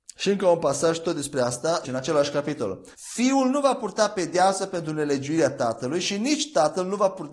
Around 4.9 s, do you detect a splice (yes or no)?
no